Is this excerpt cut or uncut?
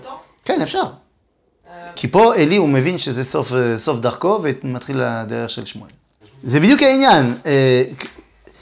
cut